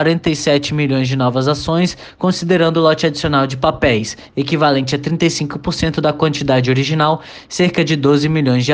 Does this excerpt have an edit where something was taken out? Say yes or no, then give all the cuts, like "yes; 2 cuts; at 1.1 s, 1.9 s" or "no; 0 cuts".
no; 0 cuts